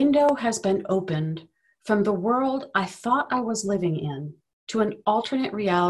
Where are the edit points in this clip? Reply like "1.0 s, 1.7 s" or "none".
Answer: none